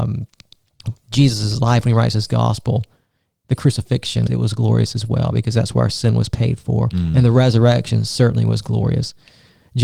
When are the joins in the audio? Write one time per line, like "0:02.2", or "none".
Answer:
0:04.3

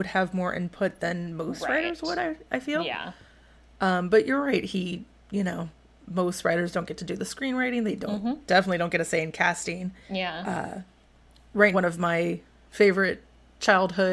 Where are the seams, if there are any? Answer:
0:10.0
0:11.7

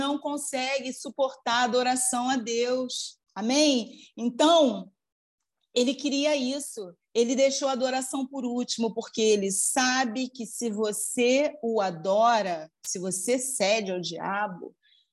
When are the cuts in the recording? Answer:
0:03.2

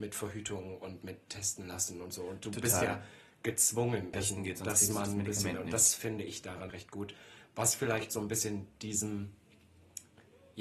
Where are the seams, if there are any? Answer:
0:04.1
0:06.7

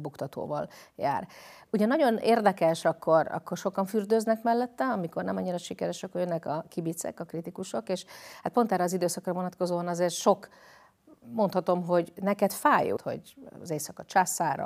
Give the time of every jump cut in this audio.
0:02.8
0:13.0

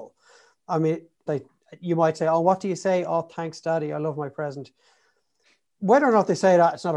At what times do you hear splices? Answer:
0:01.3

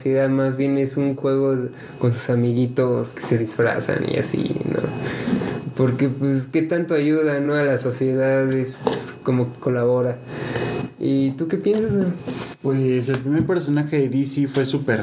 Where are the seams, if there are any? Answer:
none

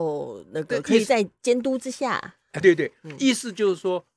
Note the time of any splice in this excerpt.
0:02.6

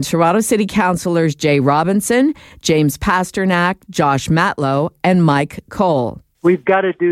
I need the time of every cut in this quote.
none

